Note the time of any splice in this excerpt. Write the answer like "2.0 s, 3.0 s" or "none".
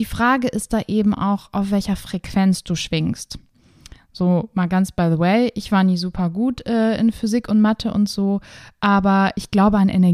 none